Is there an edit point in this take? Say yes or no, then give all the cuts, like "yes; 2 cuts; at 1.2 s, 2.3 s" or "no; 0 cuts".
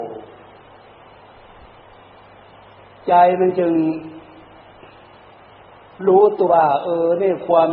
yes; 1 cut; at 6.5 s